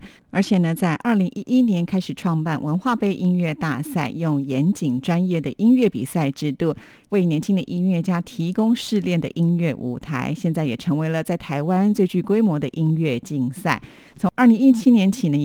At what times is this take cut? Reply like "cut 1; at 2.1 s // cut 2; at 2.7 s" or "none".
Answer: none